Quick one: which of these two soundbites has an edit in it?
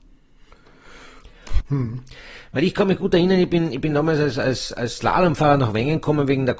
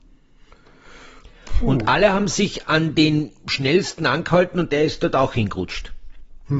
first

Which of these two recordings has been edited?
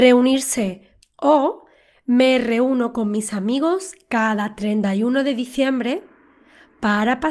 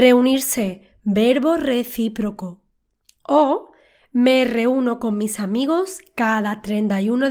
first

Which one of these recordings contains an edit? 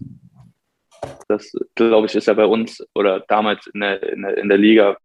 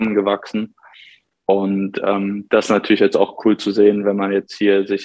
first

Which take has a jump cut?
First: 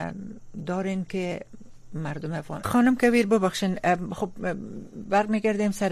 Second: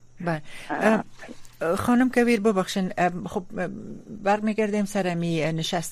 first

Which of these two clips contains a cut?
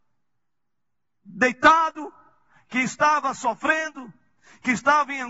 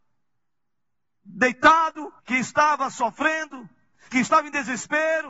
second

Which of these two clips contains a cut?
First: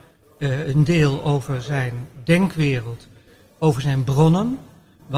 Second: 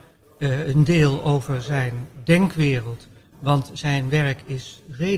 second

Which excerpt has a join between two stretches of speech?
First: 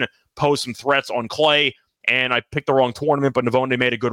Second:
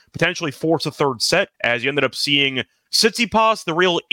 second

